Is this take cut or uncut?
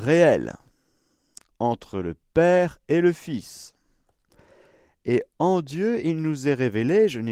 uncut